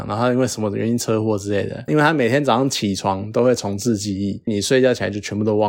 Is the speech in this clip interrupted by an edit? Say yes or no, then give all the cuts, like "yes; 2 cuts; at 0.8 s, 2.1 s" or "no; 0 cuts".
yes; 2 cuts; at 1.9 s, 4.5 s